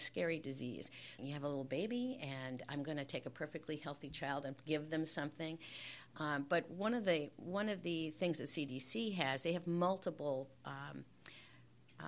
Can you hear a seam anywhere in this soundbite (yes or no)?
yes